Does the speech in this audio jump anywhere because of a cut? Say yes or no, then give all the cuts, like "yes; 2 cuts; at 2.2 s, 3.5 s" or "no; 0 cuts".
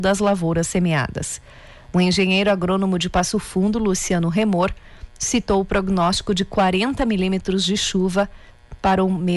yes; 1 cut; at 1.9 s